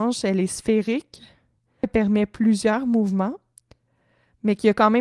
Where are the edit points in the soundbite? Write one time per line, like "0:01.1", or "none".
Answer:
0:01.8